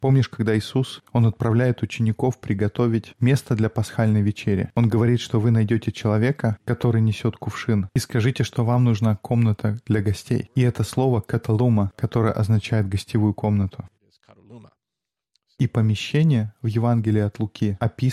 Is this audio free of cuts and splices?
yes; 0 cuts

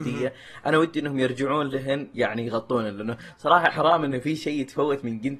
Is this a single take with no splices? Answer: no; 1 cut; at 3.7 s

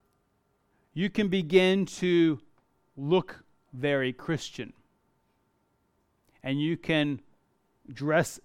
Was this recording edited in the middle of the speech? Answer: no; 0 cuts

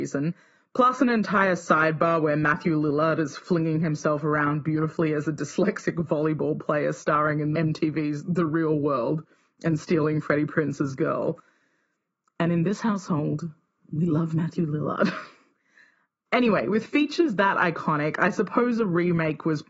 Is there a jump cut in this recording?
no; 0 cuts

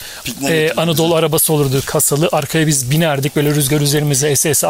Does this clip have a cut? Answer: no; 0 cuts

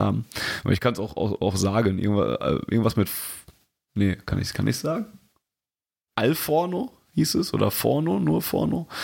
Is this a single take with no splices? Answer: yes; 0 cuts

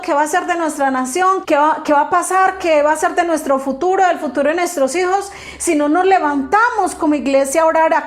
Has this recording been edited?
yes; 1 cut; at 1.4 s

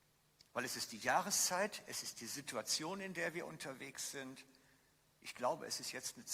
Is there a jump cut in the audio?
no; 0 cuts

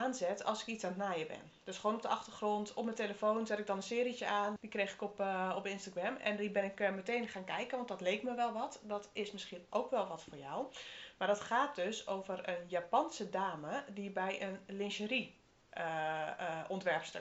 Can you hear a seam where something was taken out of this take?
yes; 1 cut; at 4.6 s

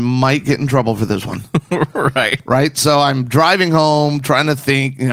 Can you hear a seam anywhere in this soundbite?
no; 0 cuts

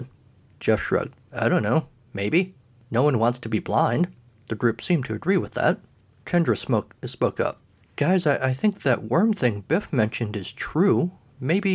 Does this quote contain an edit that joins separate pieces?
no; 0 cuts

